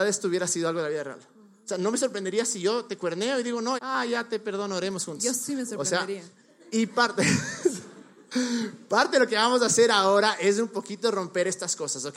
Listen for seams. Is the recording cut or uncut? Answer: cut